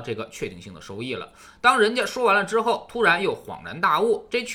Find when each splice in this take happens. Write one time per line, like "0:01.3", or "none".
none